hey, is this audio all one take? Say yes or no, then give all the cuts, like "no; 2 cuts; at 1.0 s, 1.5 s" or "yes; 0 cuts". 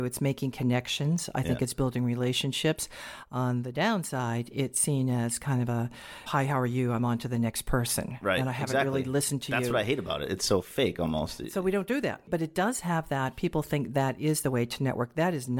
no; 1 cut; at 6.3 s